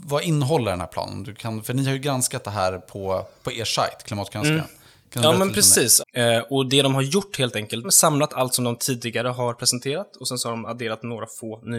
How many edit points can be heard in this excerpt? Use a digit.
2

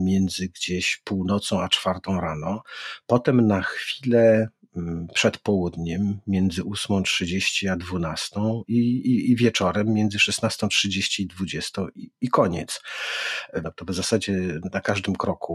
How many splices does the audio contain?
1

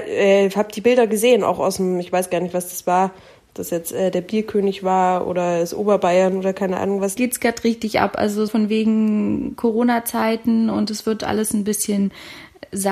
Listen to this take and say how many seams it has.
2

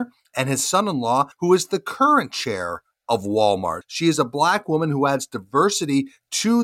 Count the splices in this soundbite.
2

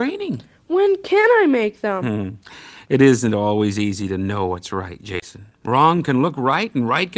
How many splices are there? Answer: 0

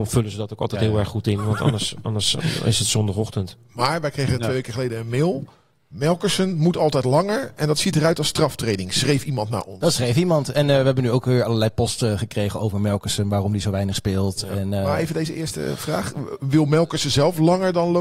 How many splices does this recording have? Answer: 0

